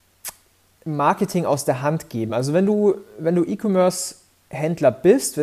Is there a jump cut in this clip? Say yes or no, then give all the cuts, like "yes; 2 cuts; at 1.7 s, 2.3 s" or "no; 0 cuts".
no; 0 cuts